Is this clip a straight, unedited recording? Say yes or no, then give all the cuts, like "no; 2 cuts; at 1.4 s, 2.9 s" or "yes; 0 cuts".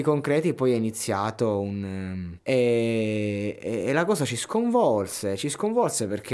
no; 1 cut; at 2.4 s